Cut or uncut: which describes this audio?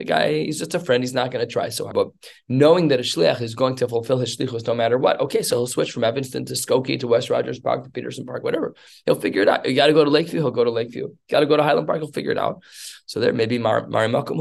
cut